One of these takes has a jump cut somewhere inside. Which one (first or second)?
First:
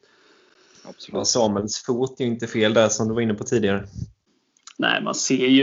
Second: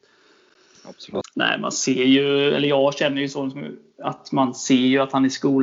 second